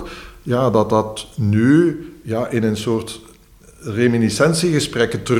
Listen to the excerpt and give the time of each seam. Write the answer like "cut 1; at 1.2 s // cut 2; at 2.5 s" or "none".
none